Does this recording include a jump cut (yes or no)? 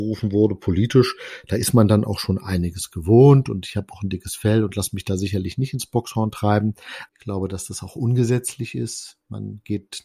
yes